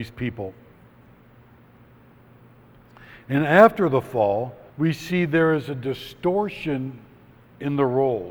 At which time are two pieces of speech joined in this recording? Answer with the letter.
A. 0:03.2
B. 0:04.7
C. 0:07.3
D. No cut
B